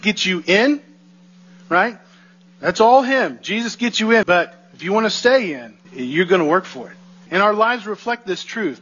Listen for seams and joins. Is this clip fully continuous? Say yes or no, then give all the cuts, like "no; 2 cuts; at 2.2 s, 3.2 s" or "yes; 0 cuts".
no; 3 cuts; at 4.2 s, 5.8 s, 7.3 s